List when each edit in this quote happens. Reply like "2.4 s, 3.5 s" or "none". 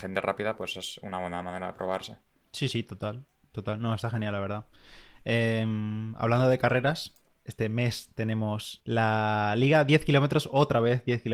none